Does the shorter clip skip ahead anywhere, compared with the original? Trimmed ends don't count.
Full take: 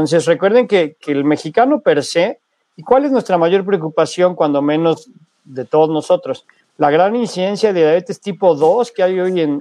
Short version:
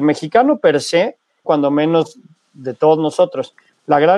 yes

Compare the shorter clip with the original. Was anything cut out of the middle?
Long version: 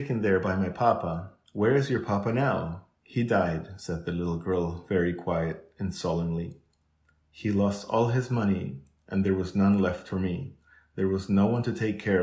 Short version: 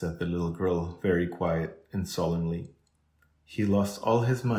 no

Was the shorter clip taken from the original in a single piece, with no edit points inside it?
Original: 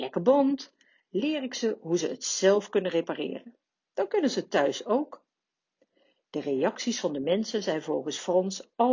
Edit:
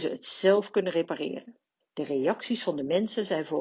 no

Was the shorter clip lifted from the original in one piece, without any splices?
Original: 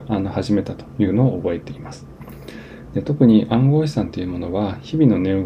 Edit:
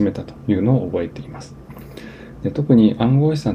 yes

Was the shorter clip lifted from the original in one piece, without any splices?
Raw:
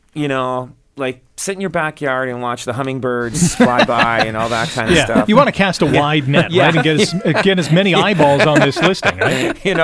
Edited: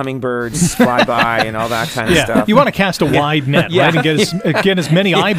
yes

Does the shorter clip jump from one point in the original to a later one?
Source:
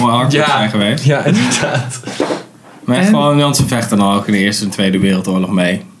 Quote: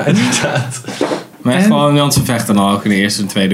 yes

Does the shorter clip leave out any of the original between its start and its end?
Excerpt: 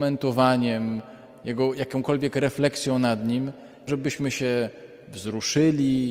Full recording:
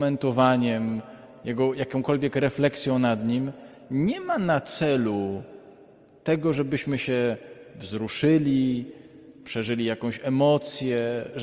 yes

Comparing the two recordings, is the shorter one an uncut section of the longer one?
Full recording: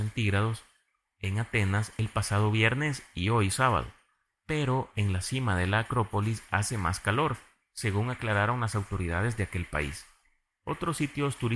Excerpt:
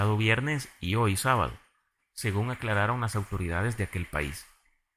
no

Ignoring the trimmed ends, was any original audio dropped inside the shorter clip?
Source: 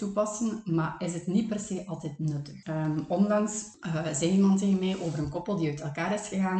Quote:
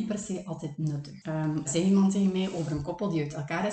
yes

